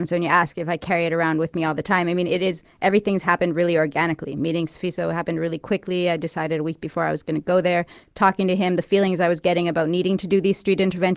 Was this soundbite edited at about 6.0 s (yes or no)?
no